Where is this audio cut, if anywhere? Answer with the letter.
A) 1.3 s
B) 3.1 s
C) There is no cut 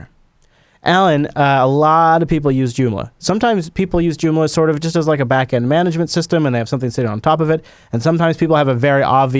C